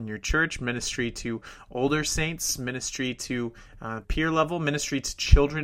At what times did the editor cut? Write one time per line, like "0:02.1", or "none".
0:04.0